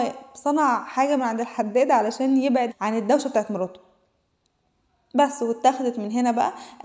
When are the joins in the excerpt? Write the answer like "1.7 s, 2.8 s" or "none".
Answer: 2.7 s